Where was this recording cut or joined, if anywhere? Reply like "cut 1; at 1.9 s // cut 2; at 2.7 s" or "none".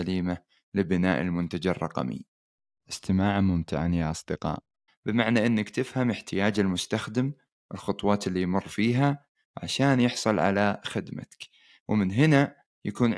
cut 1; at 2.8 s // cut 2; at 4.9 s